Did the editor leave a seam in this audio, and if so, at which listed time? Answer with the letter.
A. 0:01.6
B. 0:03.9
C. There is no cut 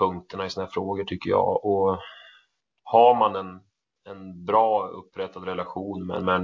C